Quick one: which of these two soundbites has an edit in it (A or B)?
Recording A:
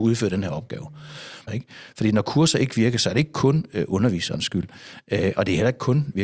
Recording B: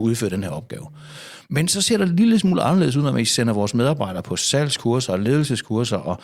A